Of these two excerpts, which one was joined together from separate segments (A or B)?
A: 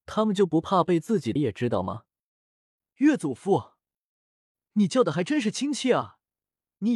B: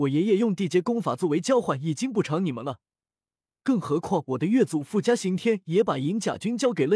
A